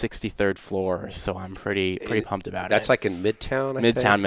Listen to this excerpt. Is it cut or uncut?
uncut